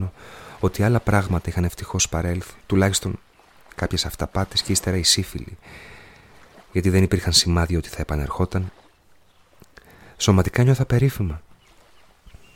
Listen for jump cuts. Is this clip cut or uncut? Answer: cut